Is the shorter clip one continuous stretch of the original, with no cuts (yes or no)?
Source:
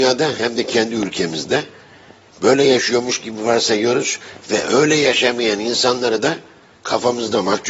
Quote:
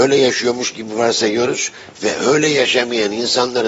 yes